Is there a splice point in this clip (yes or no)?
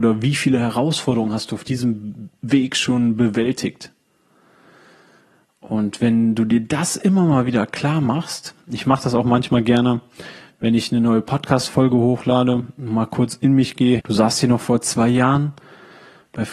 yes